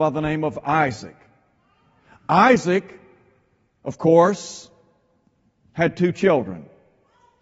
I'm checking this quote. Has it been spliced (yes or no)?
no